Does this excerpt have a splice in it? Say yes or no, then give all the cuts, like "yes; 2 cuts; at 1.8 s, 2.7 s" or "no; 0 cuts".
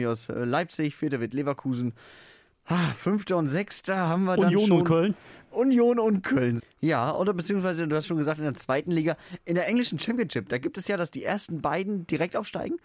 yes; 1 cut; at 6.6 s